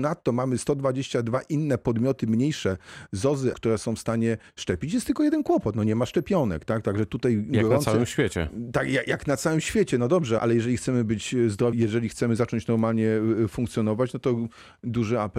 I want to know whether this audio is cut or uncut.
cut